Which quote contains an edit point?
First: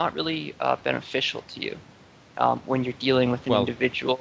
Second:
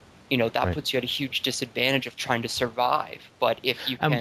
second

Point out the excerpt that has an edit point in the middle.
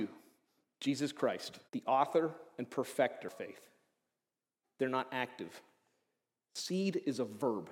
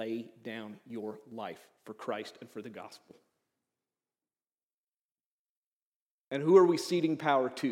first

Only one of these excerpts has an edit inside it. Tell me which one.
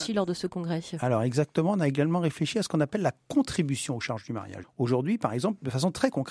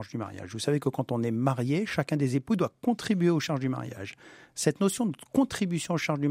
first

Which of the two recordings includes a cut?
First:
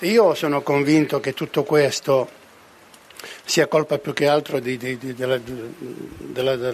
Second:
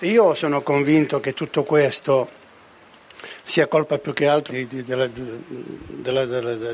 second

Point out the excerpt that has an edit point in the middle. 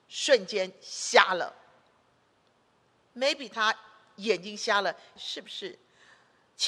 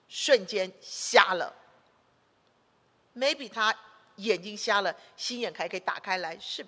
first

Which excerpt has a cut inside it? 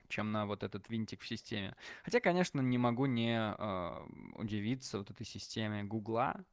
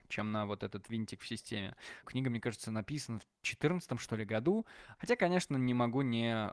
second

